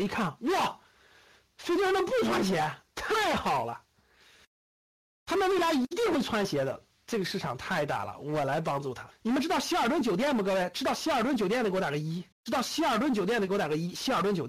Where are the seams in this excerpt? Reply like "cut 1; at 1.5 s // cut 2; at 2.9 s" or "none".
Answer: cut 1; at 9.1 s // cut 2; at 12.3 s